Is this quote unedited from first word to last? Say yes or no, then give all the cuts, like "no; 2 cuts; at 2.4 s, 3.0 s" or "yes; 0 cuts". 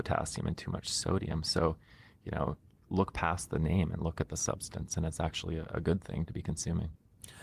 yes; 0 cuts